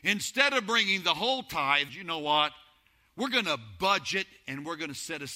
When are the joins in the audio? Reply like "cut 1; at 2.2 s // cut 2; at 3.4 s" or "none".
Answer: cut 1; at 1.9 s